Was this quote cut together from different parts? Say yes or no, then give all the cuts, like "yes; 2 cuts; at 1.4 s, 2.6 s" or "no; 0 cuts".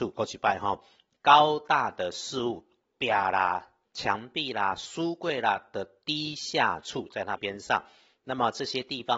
yes; 2 cuts; at 3.8 s, 7.4 s